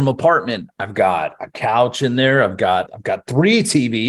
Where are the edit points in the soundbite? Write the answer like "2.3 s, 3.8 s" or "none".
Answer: 2.9 s